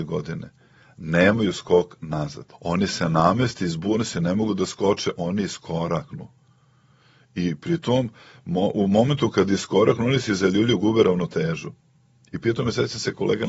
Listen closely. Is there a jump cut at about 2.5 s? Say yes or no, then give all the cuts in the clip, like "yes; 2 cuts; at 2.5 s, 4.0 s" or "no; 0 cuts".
yes; 1 cut; at 2.5 s